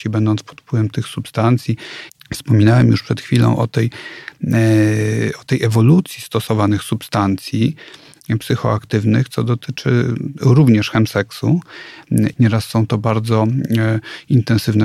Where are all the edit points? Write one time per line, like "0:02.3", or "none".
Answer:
0:02.1
0:12.3